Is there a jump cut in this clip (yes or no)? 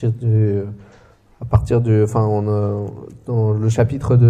no